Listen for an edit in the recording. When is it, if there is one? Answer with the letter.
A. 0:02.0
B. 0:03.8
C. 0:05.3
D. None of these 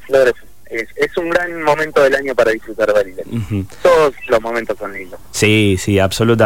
D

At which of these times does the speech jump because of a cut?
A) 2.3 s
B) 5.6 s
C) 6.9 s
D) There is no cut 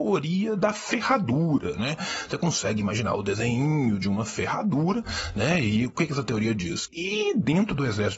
C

